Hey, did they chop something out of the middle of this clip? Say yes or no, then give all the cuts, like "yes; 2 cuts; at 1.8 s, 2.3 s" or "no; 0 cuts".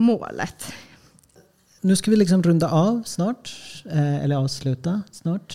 no; 0 cuts